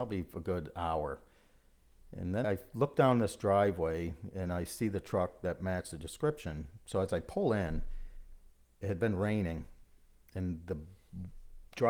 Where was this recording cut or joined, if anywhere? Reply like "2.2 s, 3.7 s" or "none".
2.4 s